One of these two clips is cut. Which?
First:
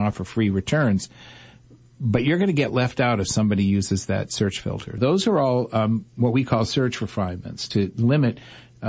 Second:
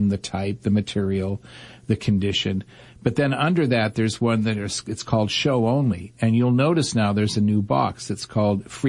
first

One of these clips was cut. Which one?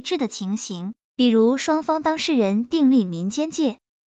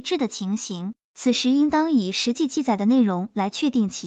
first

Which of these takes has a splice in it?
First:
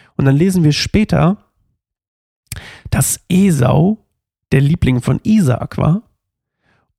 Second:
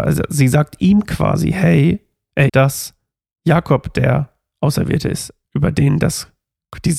second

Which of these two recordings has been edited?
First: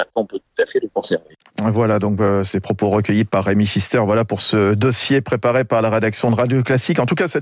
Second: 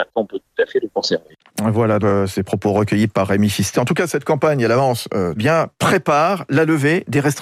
second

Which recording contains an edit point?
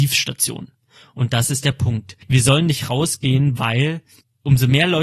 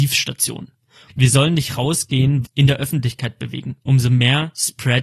second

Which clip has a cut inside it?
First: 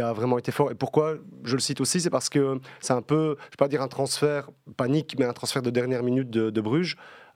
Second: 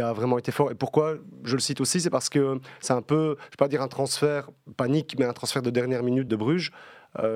second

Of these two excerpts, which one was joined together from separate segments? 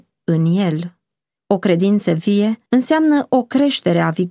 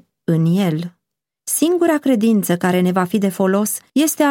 first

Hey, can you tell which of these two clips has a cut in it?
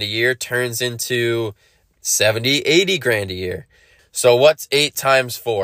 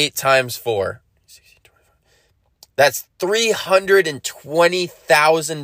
first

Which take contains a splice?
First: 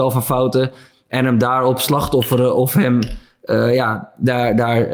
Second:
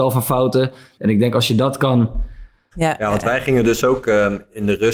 second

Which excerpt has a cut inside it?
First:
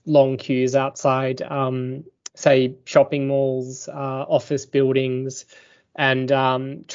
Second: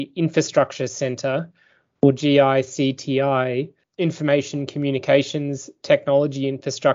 second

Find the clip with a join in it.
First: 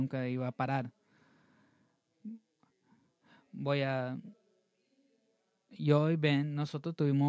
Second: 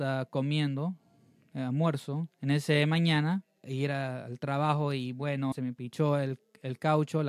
second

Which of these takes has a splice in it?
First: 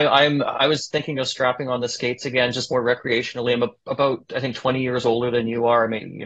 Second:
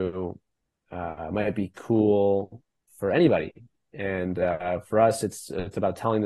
second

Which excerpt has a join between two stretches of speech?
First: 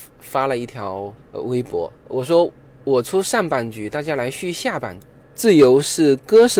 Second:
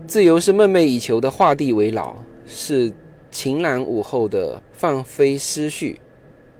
first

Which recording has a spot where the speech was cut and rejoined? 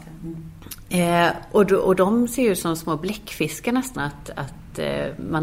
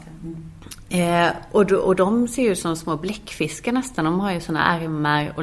first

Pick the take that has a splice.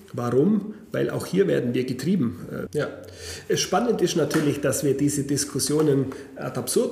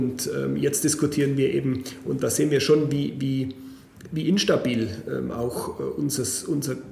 first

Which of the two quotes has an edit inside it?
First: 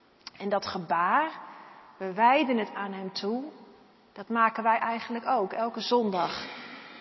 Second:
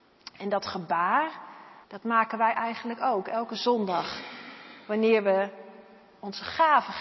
second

